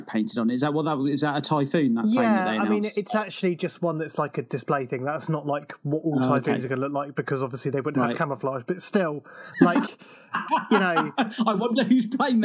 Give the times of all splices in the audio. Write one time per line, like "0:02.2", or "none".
none